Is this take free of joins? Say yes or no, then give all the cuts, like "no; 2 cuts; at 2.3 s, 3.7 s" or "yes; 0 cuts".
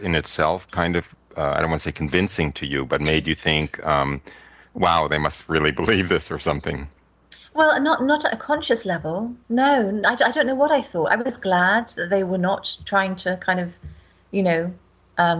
yes; 0 cuts